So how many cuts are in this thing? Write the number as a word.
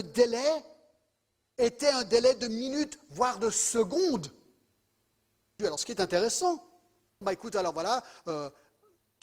two